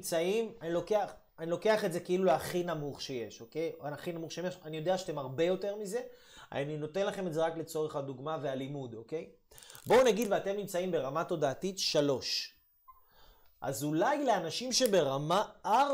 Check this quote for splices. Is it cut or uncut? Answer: uncut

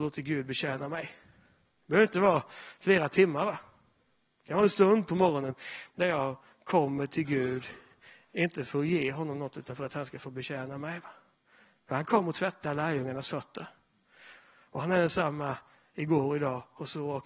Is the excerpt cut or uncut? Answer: uncut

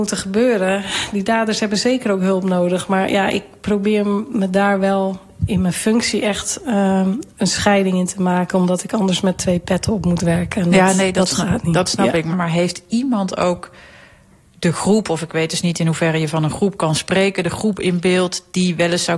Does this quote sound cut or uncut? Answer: uncut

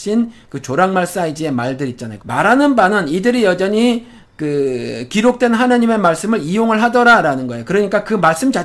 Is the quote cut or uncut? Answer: cut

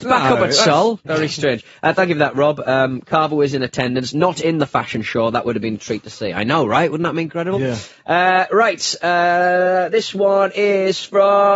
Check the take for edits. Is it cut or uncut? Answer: cut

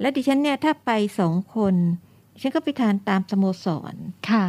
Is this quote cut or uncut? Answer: uncut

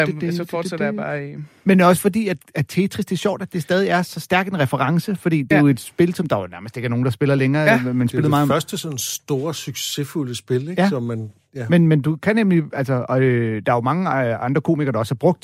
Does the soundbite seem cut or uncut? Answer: uncut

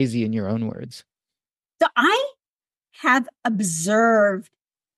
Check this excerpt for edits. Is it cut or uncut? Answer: uncut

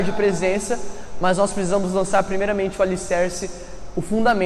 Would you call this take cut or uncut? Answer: uncut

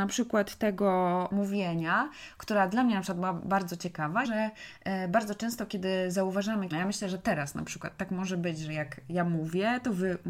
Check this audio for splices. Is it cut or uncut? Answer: cut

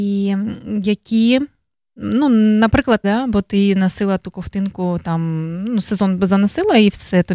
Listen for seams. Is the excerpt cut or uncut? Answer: cut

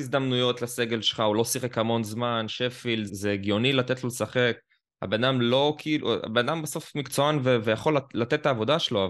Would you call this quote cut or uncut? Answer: cut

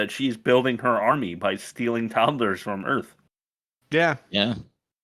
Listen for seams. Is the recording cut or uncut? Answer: uncut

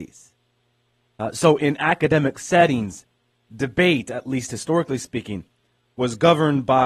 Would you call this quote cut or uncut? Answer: uncut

